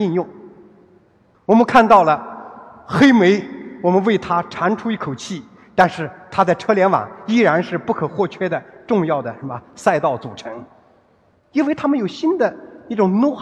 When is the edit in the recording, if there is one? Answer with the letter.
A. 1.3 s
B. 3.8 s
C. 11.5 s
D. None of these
A